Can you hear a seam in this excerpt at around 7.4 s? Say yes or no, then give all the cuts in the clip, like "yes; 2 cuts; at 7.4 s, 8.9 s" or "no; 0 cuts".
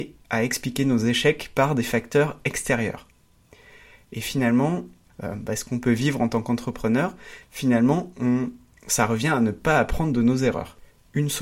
yes; 2 cuts; at 5.1 s, 7.4 s